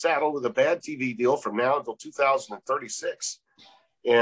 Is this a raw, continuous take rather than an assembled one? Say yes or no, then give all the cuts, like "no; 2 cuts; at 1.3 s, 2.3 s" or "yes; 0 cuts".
yes; 0 cuts